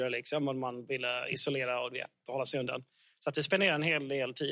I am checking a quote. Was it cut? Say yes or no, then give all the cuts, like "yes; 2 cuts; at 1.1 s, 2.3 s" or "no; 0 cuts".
no; 0 cuts